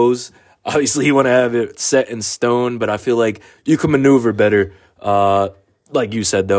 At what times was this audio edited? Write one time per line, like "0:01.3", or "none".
none